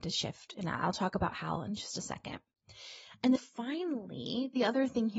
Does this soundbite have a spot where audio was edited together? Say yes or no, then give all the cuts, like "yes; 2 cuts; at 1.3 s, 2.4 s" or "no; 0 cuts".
yes; 1 cut; at 3.4 s